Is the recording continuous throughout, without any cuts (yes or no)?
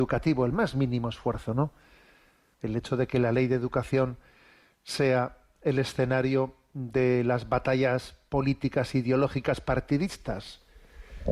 no